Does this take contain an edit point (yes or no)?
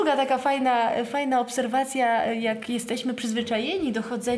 no